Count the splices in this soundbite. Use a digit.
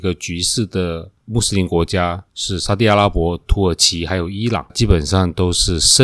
1